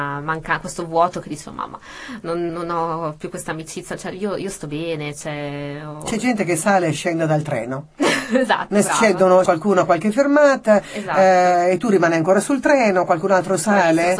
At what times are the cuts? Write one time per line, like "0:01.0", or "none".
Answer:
0:02.5
0:09.4